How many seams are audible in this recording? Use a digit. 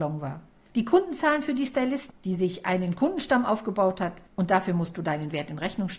2